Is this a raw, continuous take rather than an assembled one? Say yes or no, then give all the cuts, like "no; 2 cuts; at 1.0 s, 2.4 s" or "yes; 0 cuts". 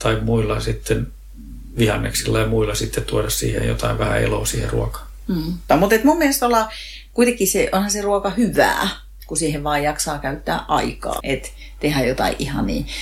no; 2 cuts; at 5.7 s, 11.2 s